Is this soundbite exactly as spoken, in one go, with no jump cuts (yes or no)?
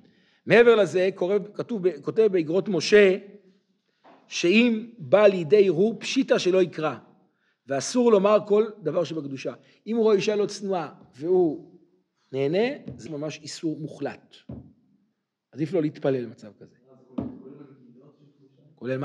no